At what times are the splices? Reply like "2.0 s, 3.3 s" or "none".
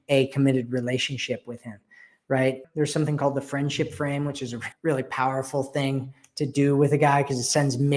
2.6 s, 4.7 s